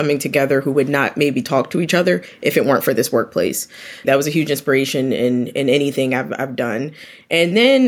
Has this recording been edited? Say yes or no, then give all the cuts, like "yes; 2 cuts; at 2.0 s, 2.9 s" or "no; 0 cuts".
yes; 1 cut; at 4.0 s